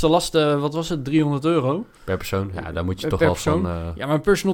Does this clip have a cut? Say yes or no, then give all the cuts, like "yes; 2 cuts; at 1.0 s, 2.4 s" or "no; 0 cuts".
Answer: no; 0 cuts